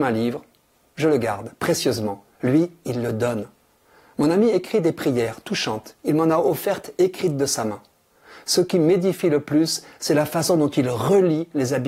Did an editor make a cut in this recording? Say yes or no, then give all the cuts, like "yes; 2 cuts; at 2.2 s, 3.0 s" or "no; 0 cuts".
no; 0 cuts